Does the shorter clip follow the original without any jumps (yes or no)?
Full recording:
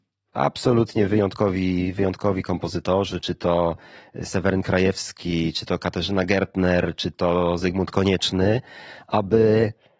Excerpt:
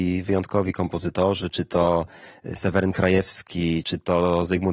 no